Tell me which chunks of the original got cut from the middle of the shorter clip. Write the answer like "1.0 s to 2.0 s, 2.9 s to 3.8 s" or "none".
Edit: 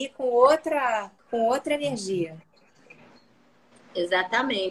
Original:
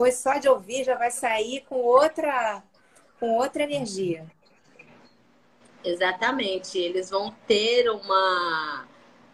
2.7 s to 3.1 s